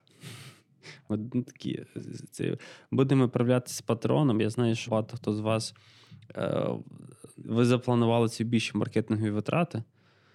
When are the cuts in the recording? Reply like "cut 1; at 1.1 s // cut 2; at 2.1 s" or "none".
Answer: cut 1; at 4.9 s // cut 2; at 7.4 s